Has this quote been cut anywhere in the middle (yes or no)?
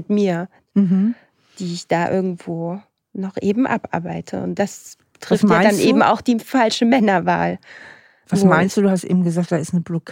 no